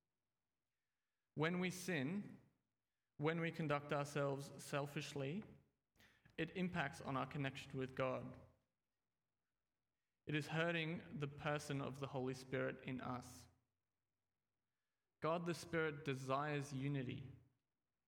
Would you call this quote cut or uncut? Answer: uncut